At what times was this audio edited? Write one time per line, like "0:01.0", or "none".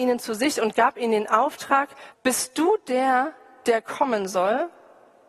0:02.1